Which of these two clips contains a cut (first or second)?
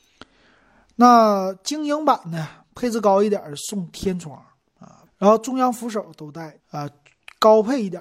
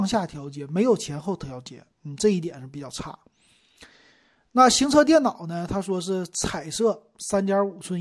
first